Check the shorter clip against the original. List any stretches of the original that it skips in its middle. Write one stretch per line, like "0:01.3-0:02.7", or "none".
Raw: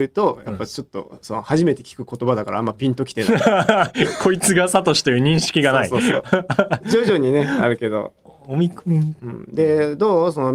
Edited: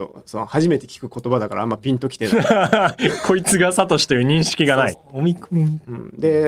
0:05.9-0:08.3